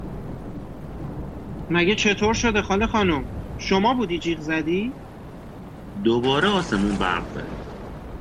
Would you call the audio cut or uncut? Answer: uncut